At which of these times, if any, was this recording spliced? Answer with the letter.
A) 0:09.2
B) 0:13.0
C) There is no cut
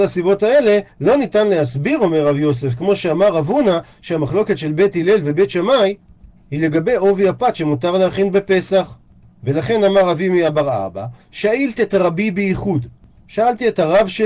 C